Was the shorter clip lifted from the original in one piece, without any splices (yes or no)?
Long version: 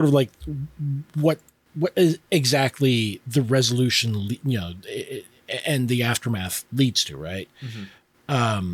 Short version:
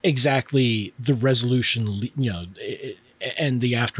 yes